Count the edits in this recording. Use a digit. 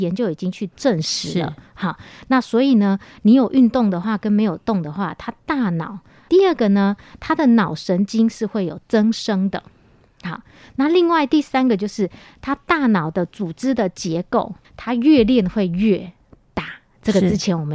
2